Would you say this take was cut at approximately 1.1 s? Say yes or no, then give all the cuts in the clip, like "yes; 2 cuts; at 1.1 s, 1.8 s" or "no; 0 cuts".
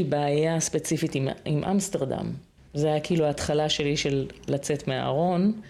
no; 1 cut; at 2.6 s